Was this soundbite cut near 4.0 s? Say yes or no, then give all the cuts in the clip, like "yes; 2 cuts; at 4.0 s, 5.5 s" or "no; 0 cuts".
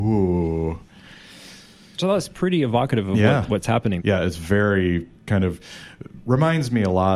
yes; 2 cuts; at 4.0 s, 5.2 s